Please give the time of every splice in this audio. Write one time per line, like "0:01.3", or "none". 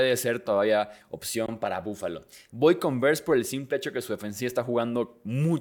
0:02.5